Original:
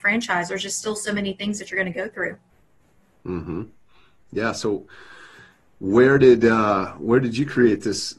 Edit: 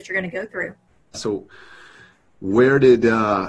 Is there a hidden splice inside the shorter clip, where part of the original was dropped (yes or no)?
yes